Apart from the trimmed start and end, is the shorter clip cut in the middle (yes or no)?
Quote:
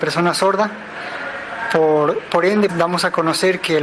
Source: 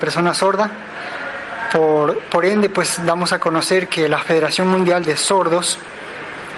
yes